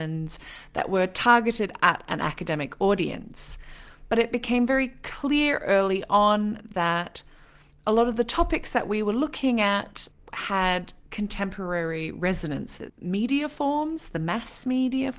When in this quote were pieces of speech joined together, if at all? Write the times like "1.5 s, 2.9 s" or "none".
10.1 s, 12.9 s